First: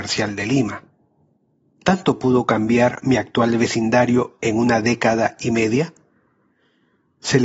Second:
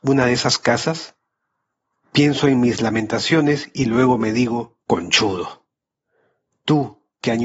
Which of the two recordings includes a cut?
second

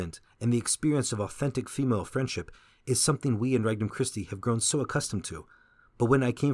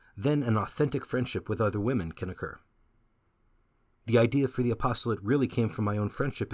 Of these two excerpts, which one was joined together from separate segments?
second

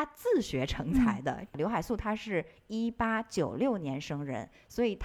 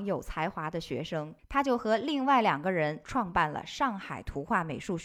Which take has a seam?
second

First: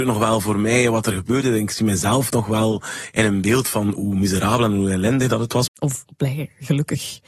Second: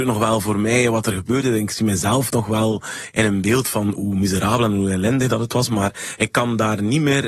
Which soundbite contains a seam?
first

